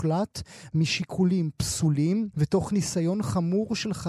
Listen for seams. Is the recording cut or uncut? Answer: cut